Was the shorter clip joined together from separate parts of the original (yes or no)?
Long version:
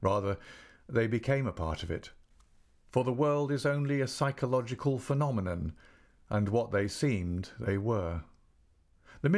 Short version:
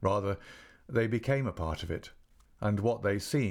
yes